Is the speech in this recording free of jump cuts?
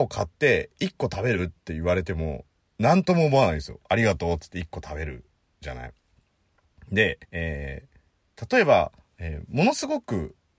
no; 1 cut; at 7.2 s

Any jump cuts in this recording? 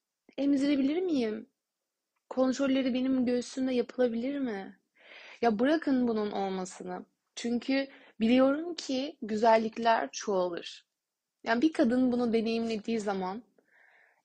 yes; 1 cut; at 7.3 s

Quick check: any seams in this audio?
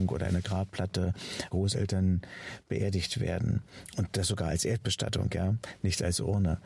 yes; 1 cut; at 1.5 s

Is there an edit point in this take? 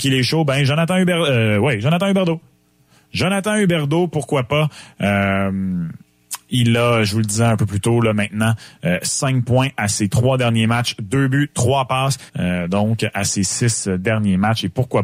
yes; 1 cut; at 12.3 s

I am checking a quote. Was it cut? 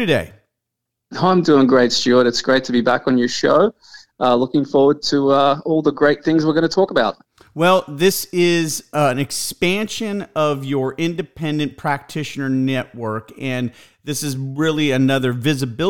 no; 0 cuts

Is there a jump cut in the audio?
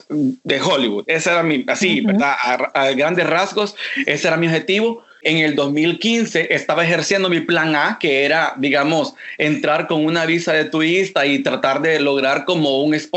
no; 0 cuts

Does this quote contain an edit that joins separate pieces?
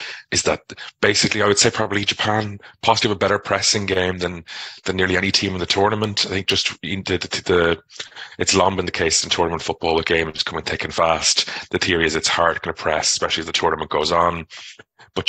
no; 0 cuts

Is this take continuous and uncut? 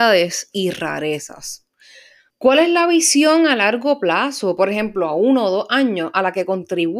no; 1 cut; at 2.3 s

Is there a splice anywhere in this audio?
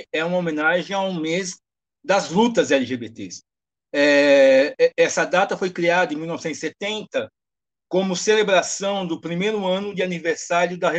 no; 0 cuts

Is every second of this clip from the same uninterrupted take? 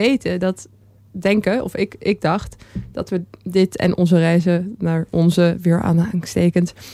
yes; 0 cuts

